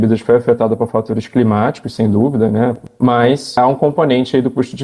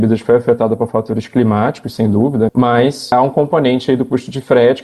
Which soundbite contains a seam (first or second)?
second